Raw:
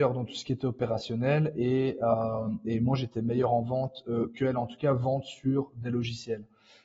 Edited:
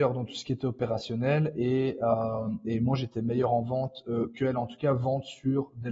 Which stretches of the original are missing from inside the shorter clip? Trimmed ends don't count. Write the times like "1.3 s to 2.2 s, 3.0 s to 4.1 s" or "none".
none